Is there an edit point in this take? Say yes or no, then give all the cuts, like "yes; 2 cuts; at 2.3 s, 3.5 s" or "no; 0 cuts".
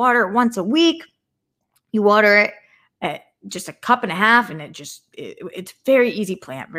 no; 0 cuts